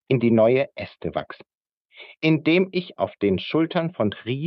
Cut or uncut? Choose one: cut